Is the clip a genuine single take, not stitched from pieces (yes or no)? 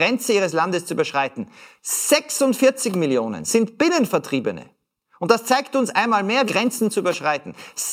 no